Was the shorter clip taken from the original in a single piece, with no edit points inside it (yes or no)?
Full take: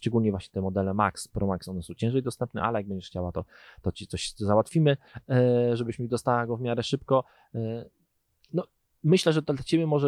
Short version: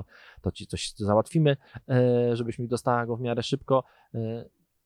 yes